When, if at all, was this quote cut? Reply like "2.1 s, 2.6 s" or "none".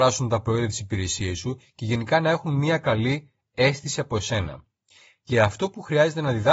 none